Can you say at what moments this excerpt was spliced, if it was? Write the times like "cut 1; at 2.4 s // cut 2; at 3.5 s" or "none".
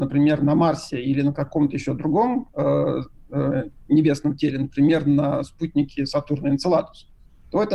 none